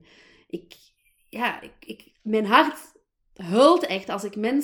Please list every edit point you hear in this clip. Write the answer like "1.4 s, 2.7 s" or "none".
none